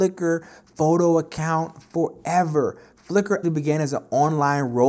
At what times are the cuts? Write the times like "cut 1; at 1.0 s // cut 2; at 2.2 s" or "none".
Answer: cut 1; at 3.4 s